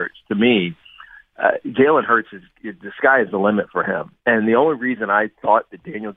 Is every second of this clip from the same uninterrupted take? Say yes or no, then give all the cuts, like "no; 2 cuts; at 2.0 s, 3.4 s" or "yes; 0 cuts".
yes; 0 cuts